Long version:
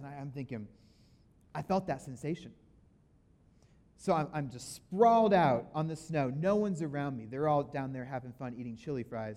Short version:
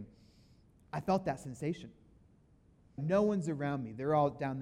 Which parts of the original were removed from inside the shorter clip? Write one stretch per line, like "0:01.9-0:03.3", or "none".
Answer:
0:03.6-0:06.3

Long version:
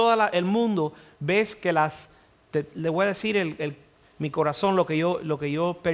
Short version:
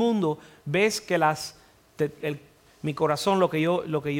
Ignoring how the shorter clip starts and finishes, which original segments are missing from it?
0:02.7-0:03.6

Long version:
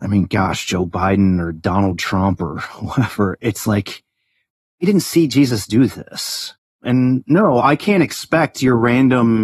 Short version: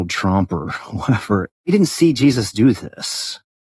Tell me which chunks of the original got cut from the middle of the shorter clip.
0:03.4-0:04.6

